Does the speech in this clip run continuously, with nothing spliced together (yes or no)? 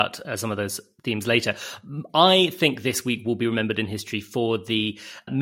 yes